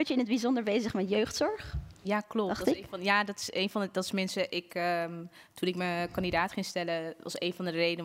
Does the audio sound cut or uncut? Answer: uncut